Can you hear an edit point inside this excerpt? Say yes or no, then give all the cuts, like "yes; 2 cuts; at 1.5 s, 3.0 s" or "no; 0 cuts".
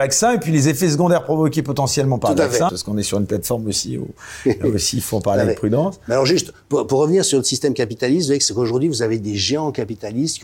yes; 1 cut; at 2.7 s